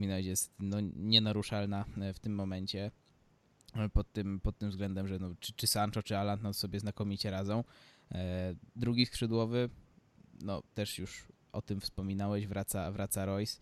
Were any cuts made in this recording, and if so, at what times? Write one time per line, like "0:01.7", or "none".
0:08.7